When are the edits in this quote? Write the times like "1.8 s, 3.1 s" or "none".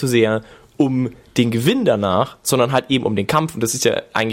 none